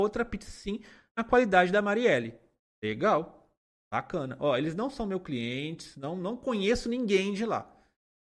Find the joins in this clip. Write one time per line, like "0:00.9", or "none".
none